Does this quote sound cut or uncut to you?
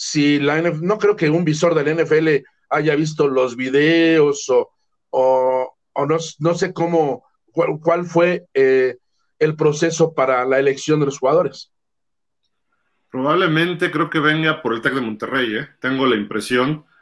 uncut